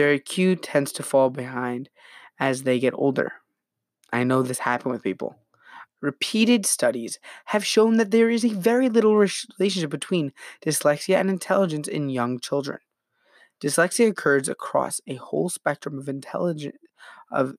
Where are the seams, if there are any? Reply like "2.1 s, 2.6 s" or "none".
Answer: 5.9 s